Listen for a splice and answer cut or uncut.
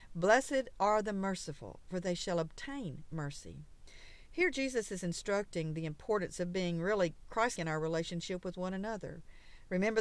cut